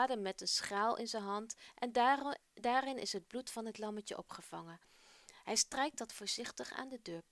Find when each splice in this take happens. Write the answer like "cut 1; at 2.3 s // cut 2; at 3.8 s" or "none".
none

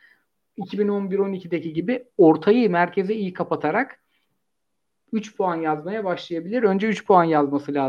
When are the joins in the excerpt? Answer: none

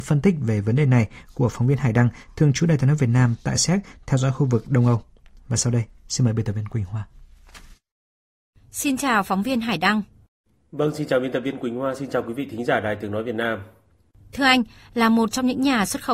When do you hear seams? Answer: none

